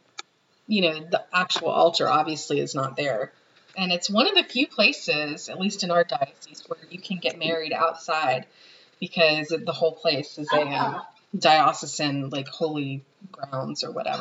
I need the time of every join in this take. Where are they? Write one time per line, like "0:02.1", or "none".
0:03.7